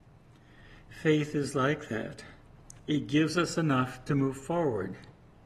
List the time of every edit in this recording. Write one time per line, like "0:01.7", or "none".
none